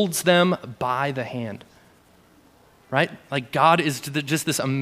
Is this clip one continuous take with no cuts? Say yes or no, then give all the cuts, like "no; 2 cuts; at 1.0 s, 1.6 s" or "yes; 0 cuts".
yes; 0 cuts